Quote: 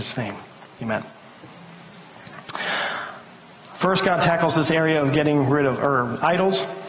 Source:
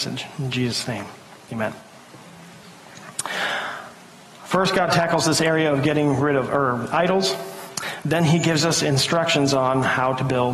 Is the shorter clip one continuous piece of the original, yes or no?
yes